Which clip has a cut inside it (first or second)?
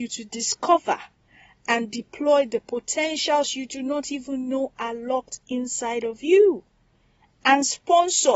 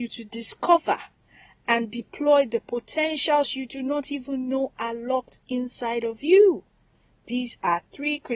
second